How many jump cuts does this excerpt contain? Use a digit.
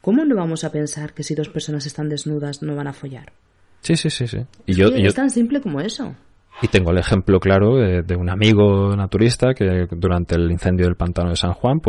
0